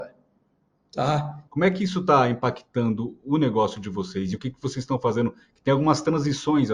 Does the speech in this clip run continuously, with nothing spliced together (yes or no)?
no